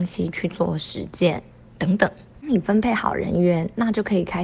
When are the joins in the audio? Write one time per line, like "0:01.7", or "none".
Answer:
0:01.7